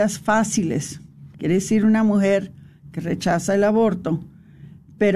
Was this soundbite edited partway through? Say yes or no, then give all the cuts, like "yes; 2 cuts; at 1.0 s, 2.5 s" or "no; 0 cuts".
yes; 1 cut; at 1.3 s